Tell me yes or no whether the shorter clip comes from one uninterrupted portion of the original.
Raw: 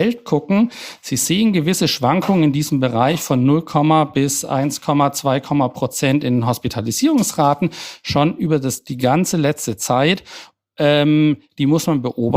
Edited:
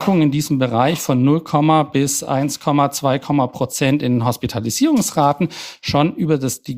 yes